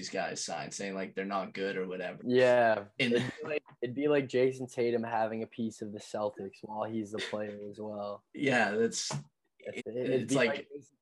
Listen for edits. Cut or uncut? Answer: cut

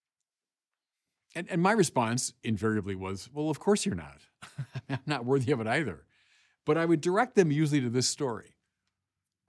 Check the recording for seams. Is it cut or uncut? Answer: uncut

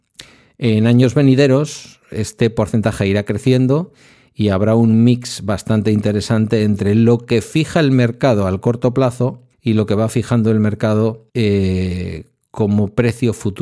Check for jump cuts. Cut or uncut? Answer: cut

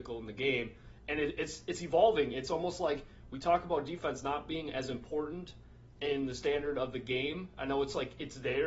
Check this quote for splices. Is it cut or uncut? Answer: uncut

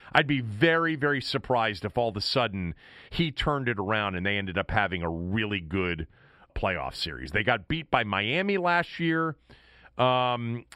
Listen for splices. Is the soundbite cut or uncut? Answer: cut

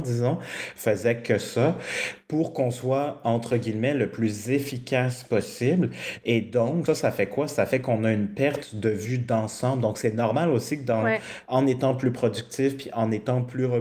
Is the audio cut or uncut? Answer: cut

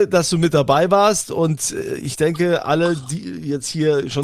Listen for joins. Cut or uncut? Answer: uncut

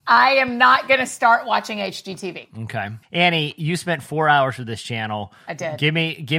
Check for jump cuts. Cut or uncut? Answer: cut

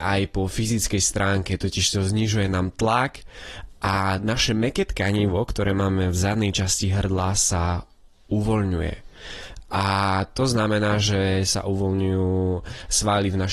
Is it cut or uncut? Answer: uncut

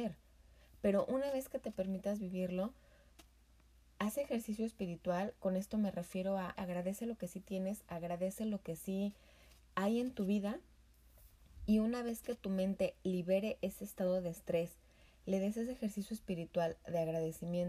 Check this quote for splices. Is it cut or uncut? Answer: cut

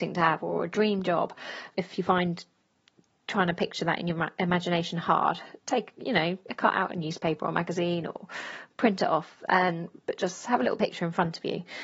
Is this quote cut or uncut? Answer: cut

